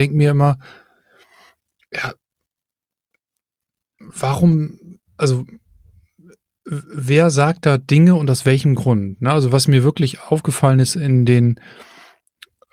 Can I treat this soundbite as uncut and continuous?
yes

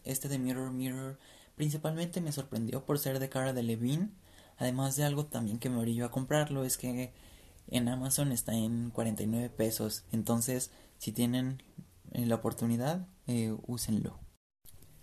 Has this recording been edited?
no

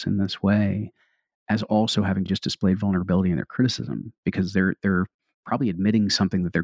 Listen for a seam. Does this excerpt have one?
no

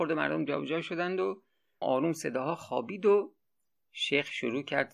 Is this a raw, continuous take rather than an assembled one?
no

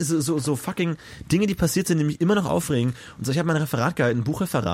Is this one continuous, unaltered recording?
yes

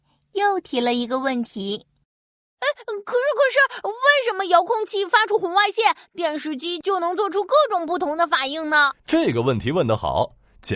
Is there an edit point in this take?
yes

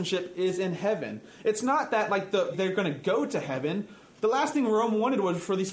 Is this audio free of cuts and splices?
no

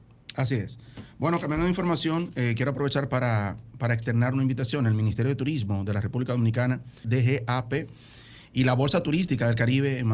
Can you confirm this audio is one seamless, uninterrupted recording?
no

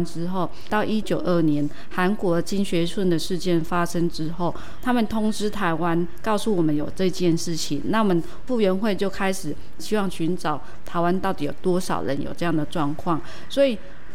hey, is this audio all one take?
no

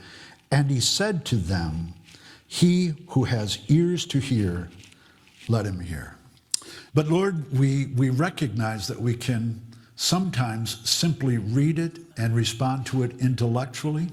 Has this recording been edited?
yes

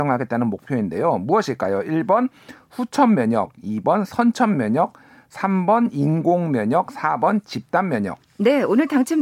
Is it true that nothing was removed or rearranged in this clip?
yes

